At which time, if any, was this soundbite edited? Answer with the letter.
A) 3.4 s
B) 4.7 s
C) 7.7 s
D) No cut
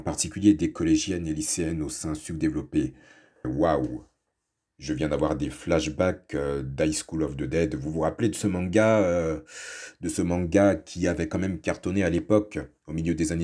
A